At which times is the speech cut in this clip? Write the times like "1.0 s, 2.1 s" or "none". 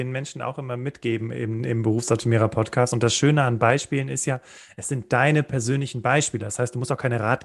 none